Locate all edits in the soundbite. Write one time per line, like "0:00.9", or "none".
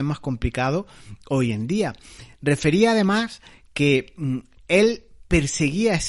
none